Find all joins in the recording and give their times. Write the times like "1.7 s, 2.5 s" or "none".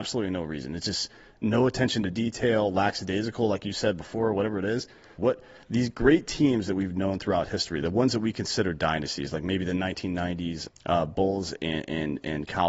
5.2 s, 10.7 s